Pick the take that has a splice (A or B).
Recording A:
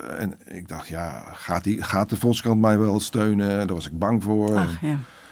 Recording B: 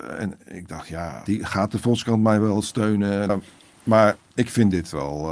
B